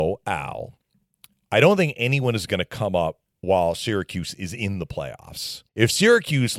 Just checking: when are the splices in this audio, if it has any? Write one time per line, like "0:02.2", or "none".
0:05.7